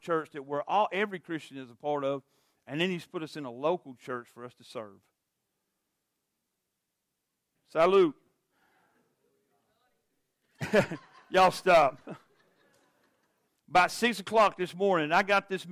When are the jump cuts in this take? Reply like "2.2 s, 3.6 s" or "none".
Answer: 7.5 s, 13.5 s